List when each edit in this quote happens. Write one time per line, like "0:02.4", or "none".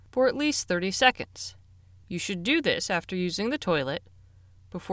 none

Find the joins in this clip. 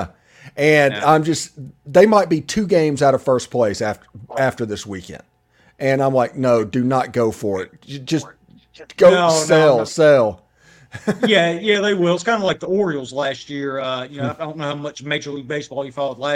none

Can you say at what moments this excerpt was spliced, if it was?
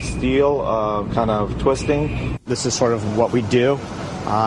0:01.1
0:02.4

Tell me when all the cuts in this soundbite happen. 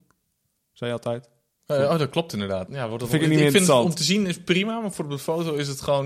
0:02.7

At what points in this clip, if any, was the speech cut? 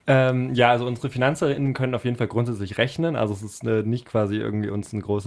none

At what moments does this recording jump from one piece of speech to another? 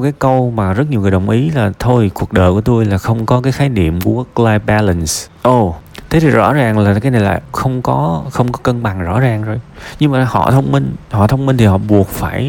0:07.5

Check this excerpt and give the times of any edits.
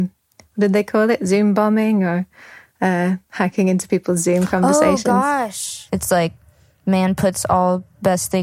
0:05.9

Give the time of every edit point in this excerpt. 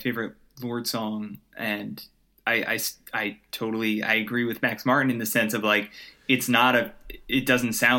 none

